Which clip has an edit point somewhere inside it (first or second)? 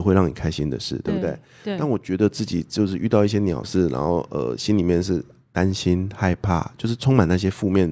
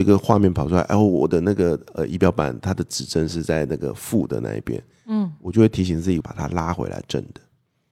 second